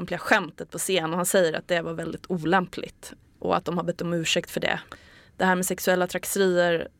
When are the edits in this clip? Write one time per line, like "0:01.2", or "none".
none